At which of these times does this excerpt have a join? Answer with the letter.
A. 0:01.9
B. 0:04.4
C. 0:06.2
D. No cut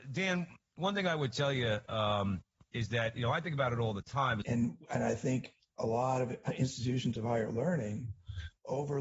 B